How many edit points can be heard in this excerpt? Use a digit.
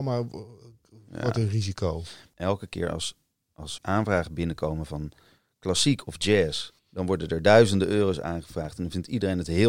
2